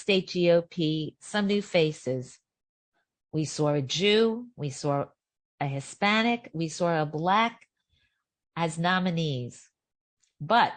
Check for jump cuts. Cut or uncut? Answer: uncut